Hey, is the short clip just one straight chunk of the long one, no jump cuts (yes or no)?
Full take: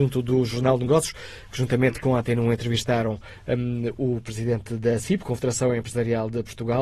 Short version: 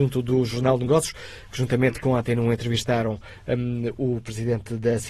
yes